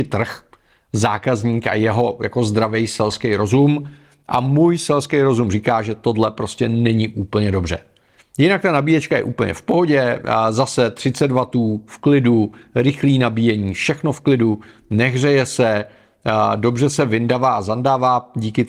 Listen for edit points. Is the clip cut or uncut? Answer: uncut